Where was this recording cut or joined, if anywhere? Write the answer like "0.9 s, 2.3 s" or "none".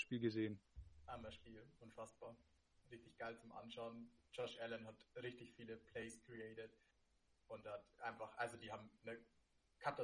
7.9 s